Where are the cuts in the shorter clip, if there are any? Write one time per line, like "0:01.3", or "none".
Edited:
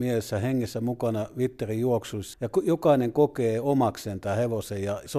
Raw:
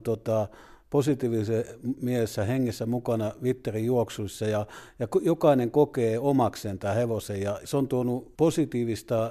0:02.3